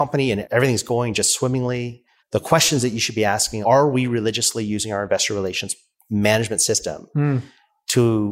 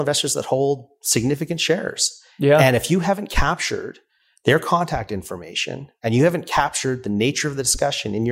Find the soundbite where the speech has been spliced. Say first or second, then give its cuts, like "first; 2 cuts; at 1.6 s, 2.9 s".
first; 2 cuts; at 2.2 s, 3.6 s